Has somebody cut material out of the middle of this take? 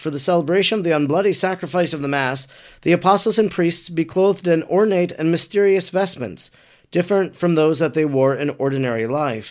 no; 0 cuts

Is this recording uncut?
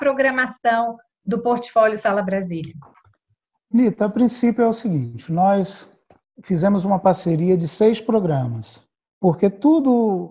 yes; 0 cuts

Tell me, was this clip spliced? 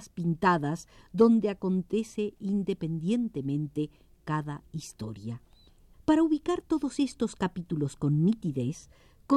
yes; 1 cut; at 5.9 s

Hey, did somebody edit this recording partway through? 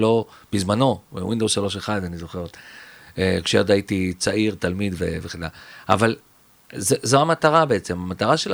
no; 0 cuts

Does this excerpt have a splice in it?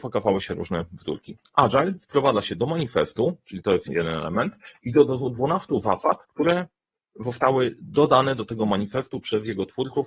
yes; 1 cut; at 3.9 s

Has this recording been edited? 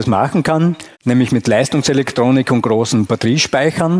yes; 1 cut; at 0.9 s

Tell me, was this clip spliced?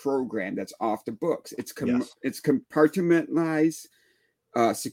no; 0 cuts

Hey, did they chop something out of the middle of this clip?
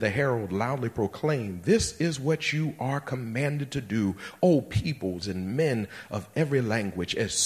yes; 1 cut; at 5.2 s

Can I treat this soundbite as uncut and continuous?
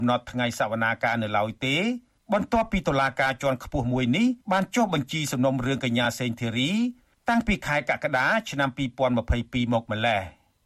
no; 1 cut; at 4.4 s

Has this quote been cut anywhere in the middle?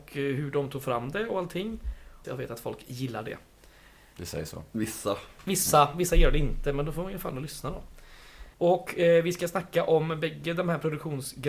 yes; 2 cuts; at 2.2 s, 8.5 s

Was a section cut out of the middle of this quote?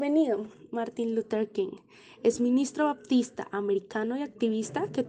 no; 0 cuts

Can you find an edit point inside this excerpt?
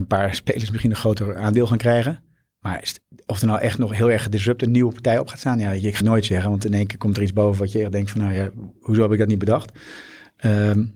yes; 1 cut; at 6.0 s

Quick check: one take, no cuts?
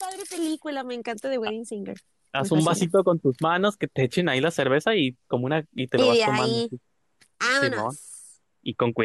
yes; 0 cuts

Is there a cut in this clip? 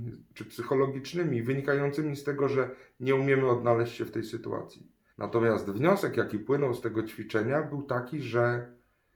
yes; 1 cut; at 5.1 s

